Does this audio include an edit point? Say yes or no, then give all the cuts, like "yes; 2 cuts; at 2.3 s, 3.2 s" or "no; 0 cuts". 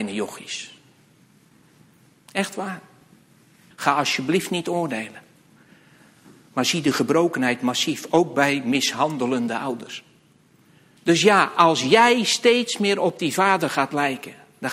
yes; 2 cuts; at 3.7 s, 11.0 s